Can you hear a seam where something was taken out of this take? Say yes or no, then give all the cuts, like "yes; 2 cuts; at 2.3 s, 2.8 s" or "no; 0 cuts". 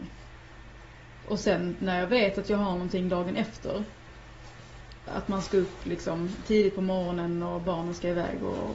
yes; 1 cut; at 5.1 s